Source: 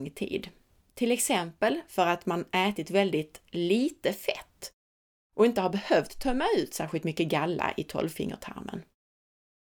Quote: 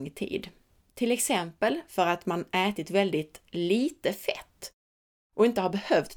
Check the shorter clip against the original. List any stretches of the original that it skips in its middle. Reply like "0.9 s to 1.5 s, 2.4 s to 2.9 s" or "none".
none